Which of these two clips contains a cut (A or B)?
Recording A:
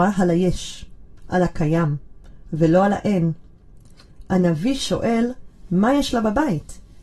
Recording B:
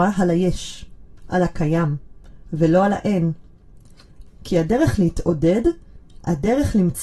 B